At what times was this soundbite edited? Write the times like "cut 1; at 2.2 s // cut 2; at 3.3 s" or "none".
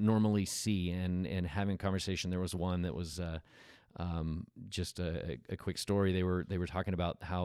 none